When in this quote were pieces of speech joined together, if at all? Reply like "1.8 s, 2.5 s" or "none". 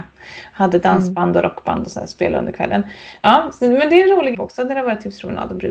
3.2 s, 4.3 s